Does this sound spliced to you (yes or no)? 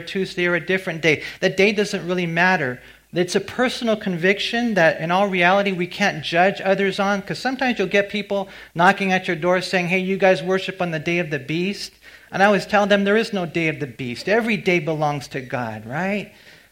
no